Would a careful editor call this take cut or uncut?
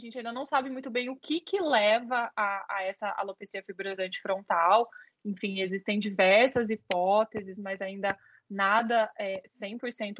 uncut